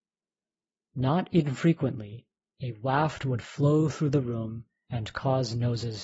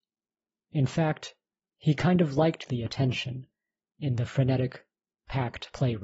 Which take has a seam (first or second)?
second